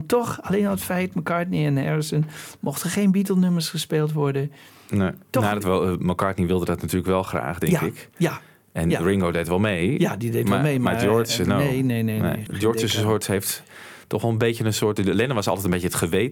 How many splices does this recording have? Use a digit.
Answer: 1